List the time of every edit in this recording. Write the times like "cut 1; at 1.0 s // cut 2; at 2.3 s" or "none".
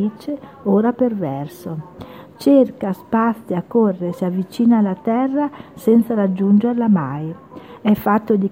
none